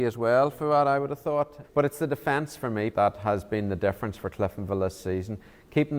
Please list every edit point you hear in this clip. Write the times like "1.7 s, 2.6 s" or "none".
1.6 s, 2.9 s

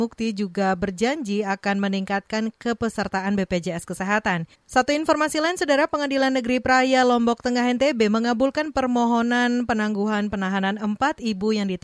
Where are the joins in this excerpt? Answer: 4.5 s

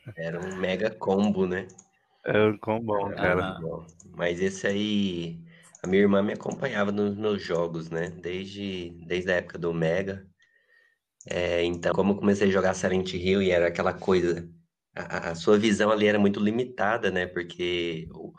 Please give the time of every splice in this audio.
11.9 s

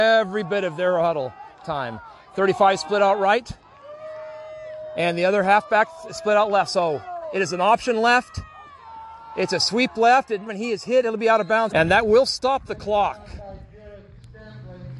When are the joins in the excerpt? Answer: 10.5 s, 11.7 s

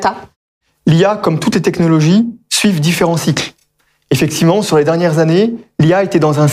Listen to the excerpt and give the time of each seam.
none

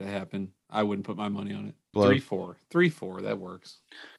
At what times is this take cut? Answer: 1.9 s

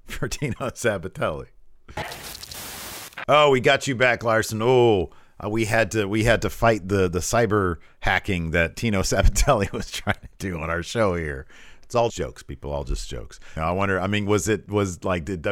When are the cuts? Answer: 12.1 s, 13.6 s

